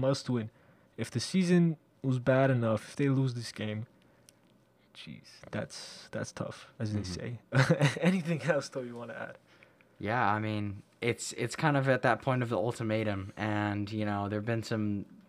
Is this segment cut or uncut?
uncut